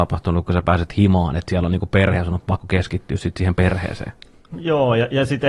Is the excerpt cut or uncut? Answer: cut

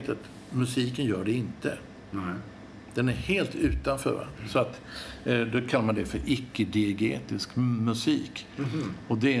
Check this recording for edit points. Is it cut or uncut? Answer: uncut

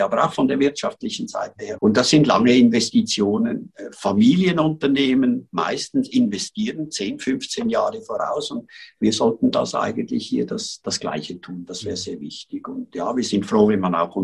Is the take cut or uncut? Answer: cut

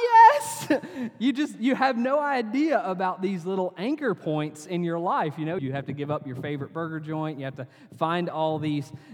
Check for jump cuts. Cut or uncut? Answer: cut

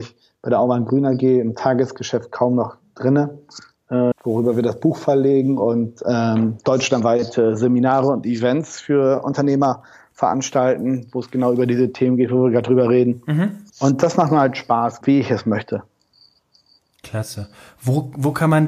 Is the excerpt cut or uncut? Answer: cut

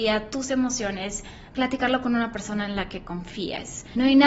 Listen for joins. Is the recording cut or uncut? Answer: cut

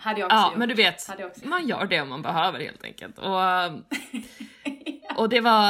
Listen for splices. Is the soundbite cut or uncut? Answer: cut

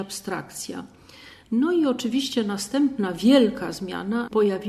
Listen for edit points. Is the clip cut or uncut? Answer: cut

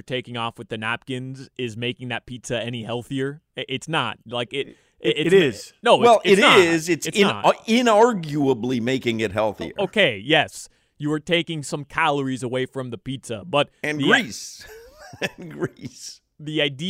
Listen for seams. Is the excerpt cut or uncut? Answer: uncut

